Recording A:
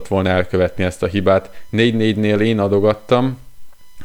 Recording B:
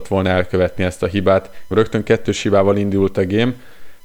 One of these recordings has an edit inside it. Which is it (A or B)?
B